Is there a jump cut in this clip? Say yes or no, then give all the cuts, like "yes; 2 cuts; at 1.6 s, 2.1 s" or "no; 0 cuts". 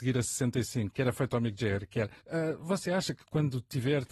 yes; 2 cuts; at 0.9 s, 2.2 s